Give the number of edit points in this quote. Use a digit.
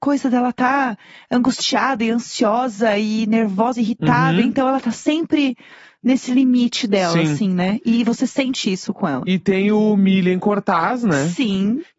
0